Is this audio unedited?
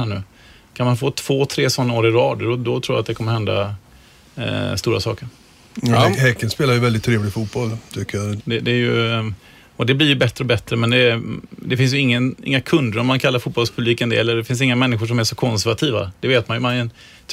no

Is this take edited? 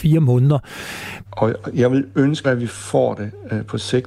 yes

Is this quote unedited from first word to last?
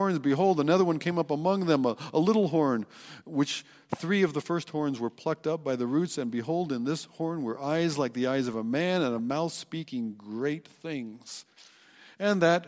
yes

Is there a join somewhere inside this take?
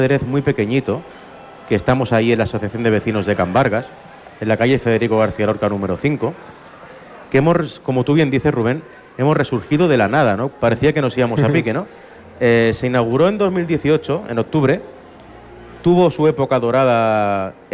yes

